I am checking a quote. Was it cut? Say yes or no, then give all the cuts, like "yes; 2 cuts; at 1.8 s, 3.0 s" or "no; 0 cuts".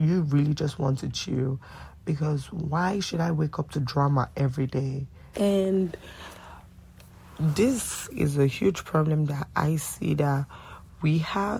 yes; 2 cuts; at 5.3 s, 8.1 s